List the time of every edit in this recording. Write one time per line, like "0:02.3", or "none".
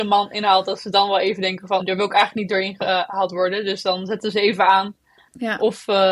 0:01.8